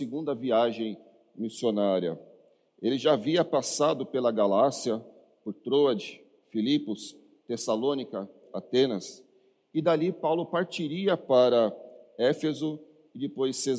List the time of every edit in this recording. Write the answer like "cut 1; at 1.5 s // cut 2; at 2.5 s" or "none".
cut 1; at 8.4 s